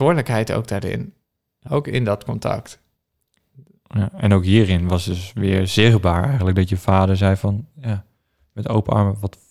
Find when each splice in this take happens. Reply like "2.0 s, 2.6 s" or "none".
1.7 s